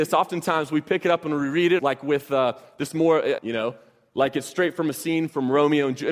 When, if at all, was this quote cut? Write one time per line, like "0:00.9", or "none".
0:01.8
0:03.4